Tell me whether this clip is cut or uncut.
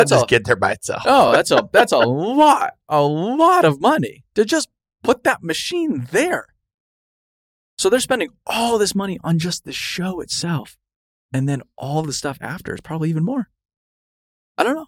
uncut